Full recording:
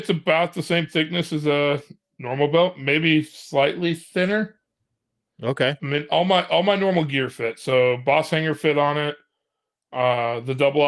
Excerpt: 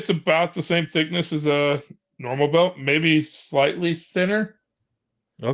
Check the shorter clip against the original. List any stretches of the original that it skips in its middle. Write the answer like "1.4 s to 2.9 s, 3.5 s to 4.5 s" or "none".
none